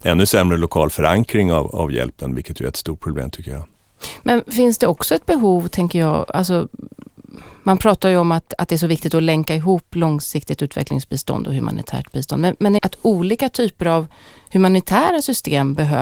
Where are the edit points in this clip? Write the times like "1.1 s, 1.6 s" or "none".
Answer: 12.8 s